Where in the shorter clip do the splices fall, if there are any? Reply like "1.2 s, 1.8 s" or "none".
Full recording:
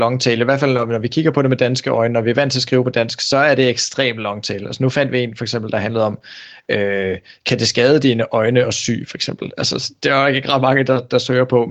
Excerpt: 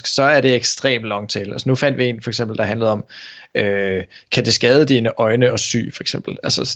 none

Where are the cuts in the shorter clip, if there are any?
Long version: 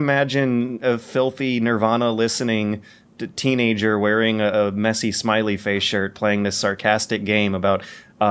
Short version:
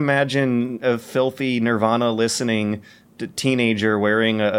none

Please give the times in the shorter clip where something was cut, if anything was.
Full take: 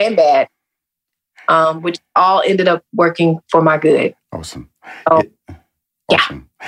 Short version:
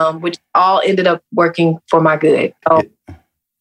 2.6 s

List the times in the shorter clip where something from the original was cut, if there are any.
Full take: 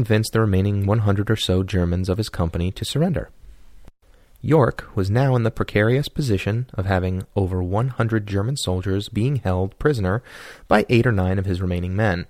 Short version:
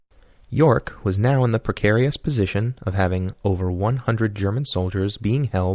none

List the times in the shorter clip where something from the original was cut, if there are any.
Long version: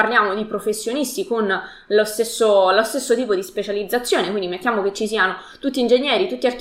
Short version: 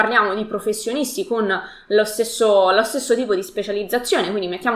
none

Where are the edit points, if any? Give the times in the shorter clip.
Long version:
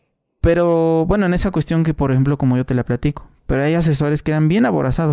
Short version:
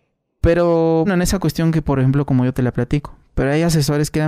1.0 s

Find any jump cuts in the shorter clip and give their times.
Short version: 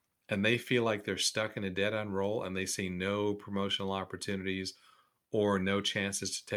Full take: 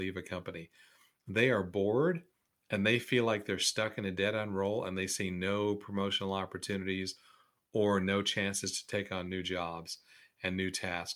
none

